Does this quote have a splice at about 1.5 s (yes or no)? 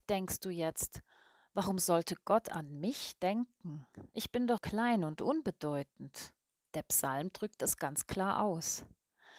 no